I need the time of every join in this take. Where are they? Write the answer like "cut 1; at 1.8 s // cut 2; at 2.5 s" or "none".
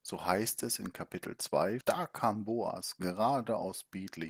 cut 1; at 1.8 s